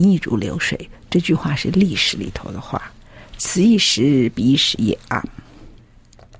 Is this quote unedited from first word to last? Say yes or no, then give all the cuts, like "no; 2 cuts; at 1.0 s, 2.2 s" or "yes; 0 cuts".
yes; 0 cuts